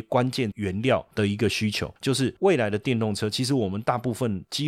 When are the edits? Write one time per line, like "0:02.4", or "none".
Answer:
0:02.0